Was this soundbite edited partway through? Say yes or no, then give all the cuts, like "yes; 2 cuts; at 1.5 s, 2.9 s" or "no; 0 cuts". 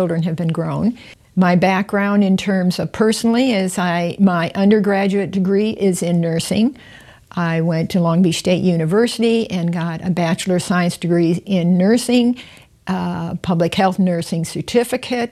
no; 0 cuts